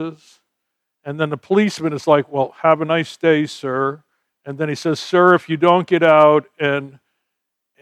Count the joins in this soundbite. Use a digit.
0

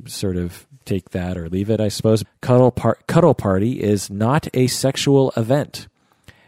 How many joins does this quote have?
1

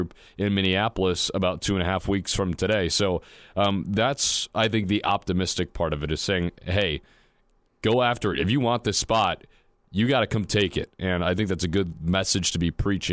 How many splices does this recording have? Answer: 0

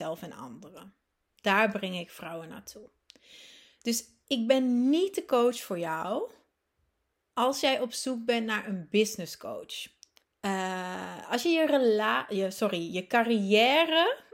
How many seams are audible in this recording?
1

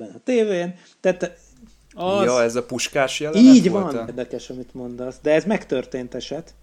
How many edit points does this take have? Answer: 1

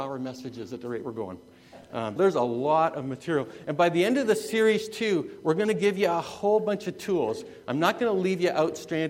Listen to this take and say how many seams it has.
1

